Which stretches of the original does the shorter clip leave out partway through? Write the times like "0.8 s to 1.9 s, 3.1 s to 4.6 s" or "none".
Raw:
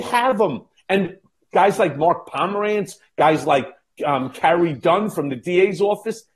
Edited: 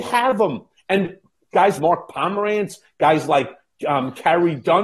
1.8 s to 1.9 s